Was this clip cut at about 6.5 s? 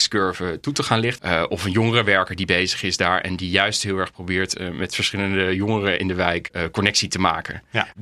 no; 1 cut; at 1.2 s

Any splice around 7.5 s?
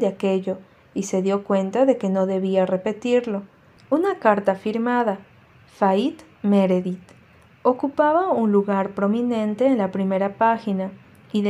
no; 1 cut; at 3.8 s

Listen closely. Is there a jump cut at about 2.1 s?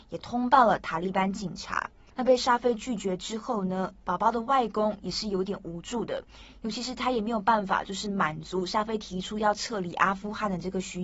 yes; 1 cut; at 2.1 s

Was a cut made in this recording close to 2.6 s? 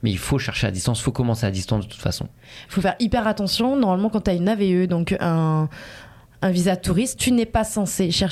yes; 1 cut; at 2.6 s

